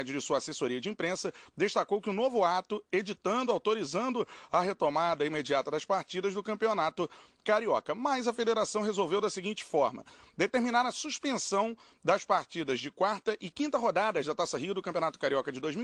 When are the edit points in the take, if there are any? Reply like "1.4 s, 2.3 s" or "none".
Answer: none

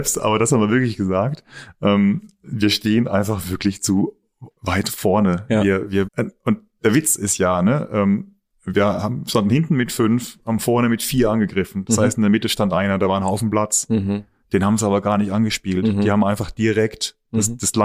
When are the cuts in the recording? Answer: 6.1 s

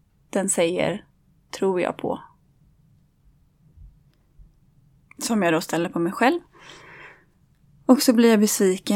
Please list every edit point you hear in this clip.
5.1 s

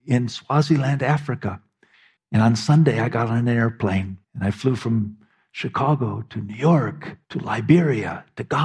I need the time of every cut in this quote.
2.2 s, 4.2 s, 7.2 s

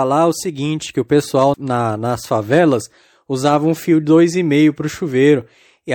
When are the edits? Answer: 1.5 s

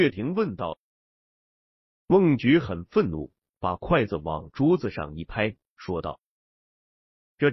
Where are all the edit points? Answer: 1.2 s

